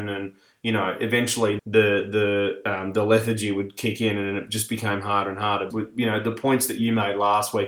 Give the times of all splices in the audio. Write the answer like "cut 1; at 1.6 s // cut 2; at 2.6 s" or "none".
cut 1; at 1.6 s // cut 2; at 5.7 s